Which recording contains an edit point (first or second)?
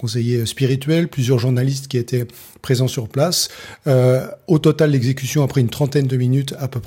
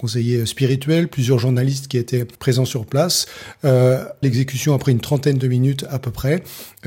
second